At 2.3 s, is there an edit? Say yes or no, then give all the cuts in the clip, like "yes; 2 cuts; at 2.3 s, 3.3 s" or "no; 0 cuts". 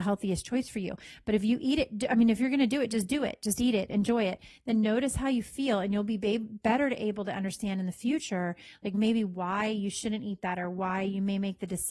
no; 0 cuts